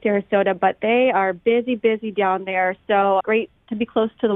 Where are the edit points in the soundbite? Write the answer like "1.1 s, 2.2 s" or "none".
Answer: 3.2 s

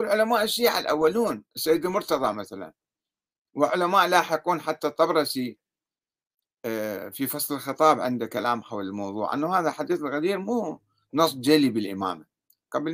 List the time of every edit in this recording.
none

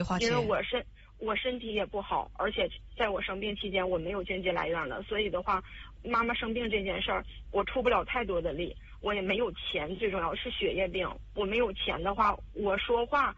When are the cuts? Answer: none

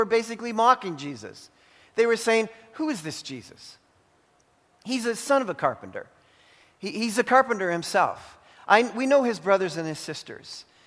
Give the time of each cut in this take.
none

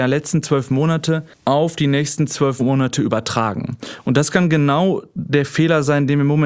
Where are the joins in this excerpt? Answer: 1.3 s

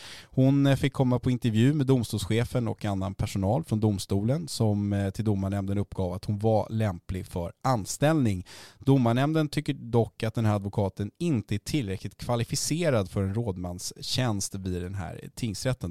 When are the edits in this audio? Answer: none

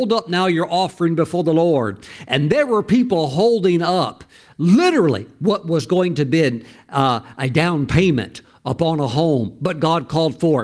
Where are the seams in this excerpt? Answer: none

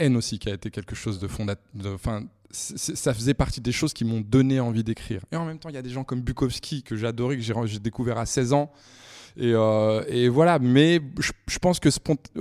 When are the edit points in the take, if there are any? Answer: none

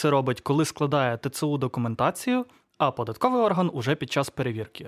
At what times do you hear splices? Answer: none

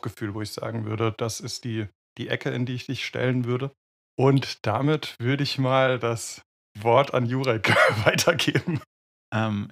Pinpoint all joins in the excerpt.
none

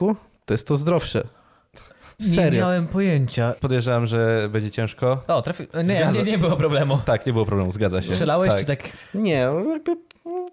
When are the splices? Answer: 3.6 s

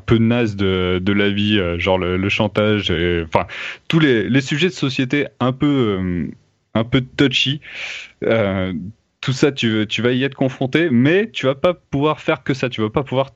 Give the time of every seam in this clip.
none

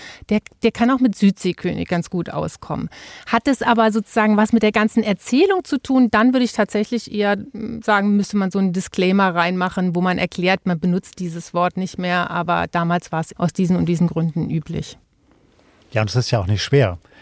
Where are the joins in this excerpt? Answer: 13.3 s

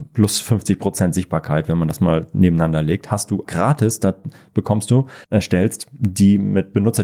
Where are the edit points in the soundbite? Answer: 3.4 s, 5.2 s

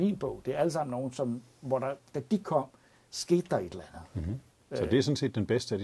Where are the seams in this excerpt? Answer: none

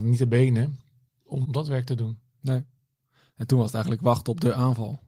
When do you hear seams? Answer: 1.4 s

